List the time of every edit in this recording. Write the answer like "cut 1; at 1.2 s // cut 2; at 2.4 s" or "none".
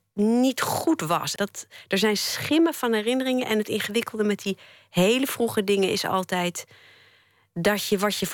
cut 1; at 1.4 s